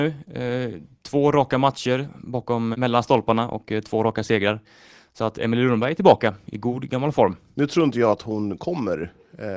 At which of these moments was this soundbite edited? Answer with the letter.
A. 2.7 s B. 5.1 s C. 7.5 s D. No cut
A